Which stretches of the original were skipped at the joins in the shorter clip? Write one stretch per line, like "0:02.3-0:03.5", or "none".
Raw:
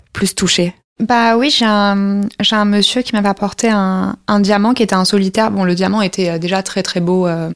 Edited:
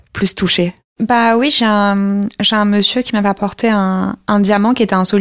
none